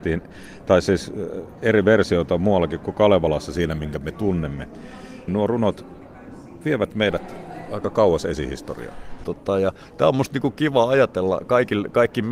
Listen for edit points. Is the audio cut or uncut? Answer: cut